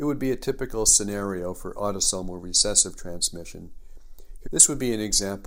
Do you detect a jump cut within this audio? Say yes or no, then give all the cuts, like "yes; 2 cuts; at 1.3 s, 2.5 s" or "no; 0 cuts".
yes; 1 cut; at 4.4 s